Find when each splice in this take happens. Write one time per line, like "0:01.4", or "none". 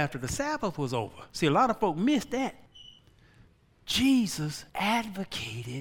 none